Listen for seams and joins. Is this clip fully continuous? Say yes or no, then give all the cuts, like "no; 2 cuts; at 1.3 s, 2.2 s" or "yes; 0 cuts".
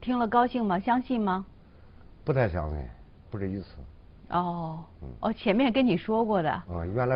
no; 1 cut; at 3.3 s